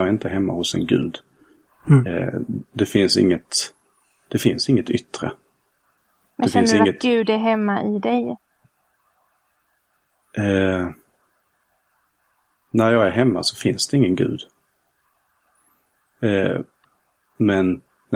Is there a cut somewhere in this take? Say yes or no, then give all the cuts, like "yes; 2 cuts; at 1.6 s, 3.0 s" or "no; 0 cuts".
no; 0 cuts